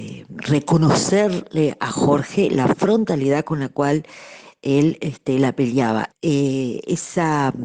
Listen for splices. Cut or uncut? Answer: cut